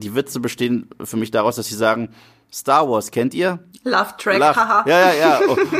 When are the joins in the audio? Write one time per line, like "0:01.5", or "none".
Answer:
0:03.7